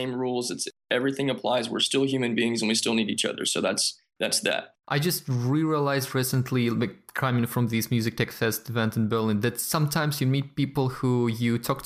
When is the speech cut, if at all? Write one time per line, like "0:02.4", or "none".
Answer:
0:04.8

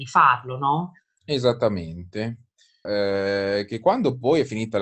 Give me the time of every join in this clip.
0:02.8

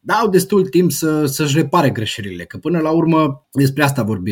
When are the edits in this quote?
none

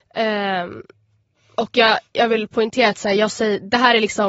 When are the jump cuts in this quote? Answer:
none

